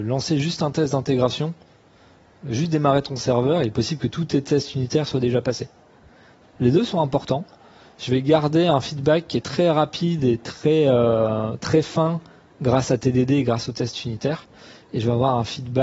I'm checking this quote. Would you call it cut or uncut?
cut